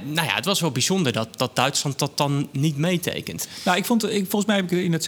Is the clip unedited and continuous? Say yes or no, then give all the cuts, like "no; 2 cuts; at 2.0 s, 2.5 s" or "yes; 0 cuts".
yes; 0 cuts